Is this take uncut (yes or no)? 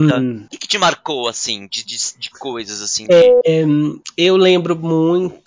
yes